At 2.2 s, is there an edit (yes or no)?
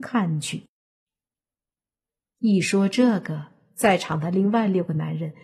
yes